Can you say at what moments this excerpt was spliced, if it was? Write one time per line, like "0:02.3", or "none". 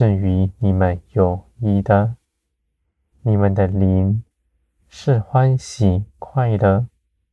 0:03.1